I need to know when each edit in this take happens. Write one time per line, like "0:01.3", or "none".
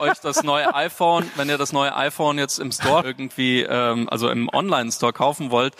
0:03.0